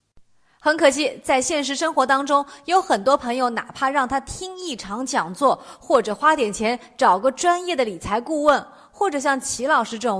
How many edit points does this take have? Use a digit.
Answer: 0